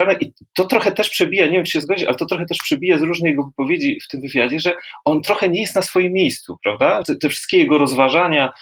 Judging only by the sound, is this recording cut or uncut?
cut